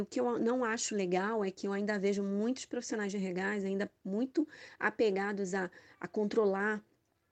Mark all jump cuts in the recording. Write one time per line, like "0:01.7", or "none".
none